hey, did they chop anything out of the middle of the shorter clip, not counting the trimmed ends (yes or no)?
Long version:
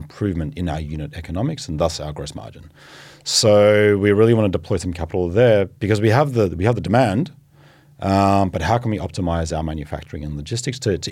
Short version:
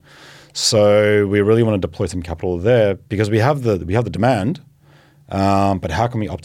no